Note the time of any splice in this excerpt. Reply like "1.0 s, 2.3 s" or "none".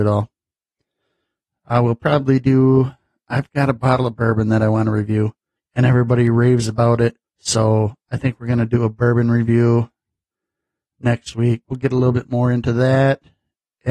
5.6 s, 7.2 s, 11.6 s